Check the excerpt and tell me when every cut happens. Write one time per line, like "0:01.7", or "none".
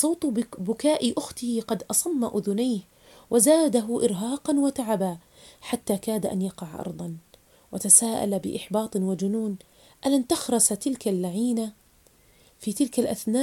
none